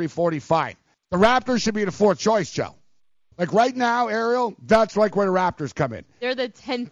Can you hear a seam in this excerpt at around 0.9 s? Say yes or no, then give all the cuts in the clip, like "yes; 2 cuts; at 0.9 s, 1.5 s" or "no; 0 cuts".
yes; 2 cuts; at 0.9 s, 3.3 s